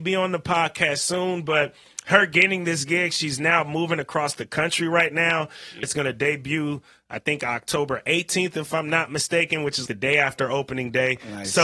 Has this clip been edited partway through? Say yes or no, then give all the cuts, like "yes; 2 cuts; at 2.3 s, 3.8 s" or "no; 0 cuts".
yes; 2 cuts; at 5.8 s, 9.9 s